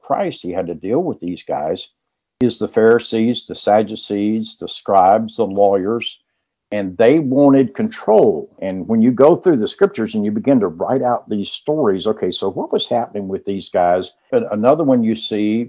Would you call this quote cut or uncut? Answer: cut